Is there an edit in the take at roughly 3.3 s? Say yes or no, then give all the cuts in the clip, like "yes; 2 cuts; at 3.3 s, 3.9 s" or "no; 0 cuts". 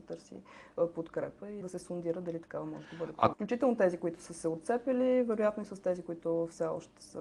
yes; 2 cuts; at 1.6 s, 3.3 s